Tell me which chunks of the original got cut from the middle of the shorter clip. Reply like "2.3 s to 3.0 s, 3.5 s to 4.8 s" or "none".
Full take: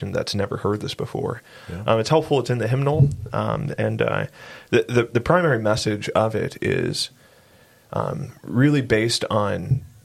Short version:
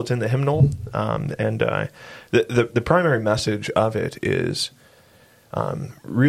none